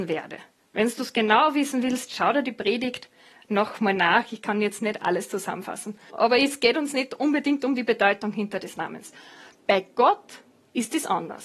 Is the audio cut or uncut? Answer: cut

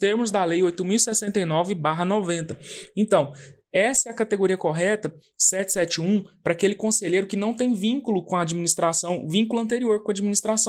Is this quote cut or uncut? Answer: uncut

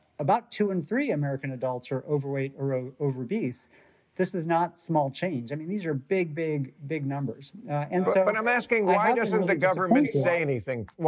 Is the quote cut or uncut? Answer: uncut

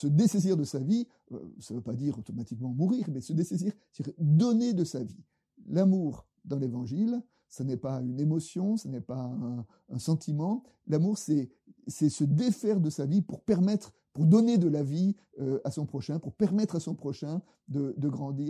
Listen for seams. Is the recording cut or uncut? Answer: uncut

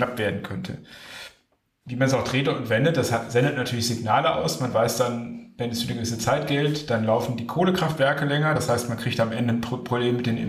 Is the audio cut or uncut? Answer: uncut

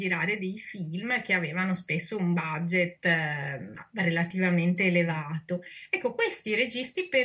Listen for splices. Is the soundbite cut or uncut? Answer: uncut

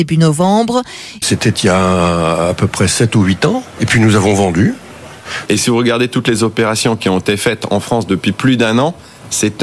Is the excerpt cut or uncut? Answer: cut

